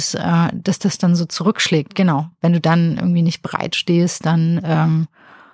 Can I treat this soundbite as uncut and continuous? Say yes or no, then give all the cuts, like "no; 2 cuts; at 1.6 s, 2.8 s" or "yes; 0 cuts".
yes; 0 cuts